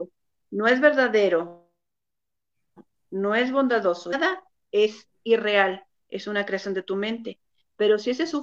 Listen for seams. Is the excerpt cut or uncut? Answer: uncut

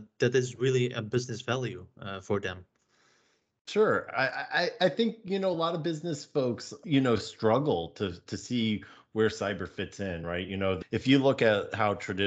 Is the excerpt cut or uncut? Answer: uncut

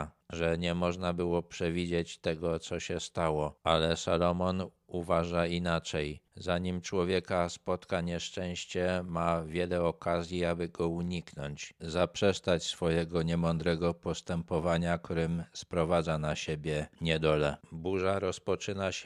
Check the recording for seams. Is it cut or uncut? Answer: cut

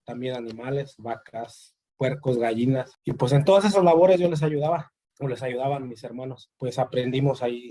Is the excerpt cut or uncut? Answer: uncut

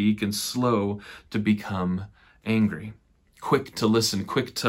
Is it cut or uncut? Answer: uncut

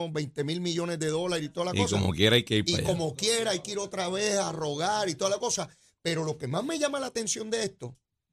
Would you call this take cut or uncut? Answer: uncut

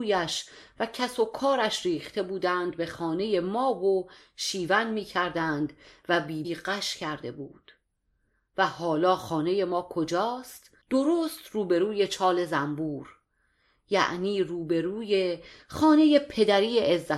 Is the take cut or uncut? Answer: cut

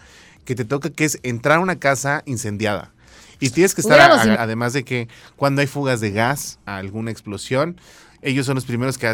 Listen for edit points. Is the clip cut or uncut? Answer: cut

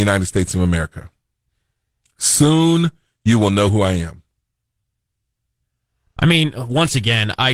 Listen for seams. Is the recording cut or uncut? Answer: uncut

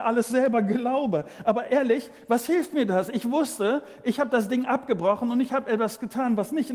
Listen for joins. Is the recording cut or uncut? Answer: uncut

